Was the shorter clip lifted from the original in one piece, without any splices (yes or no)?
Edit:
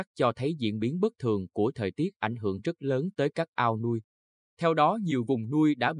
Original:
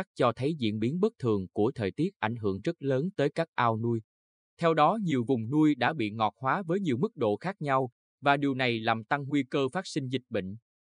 yes